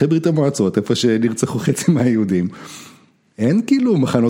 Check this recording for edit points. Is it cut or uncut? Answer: uncut